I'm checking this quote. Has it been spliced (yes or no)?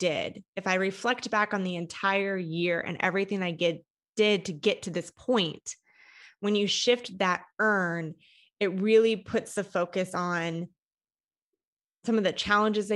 no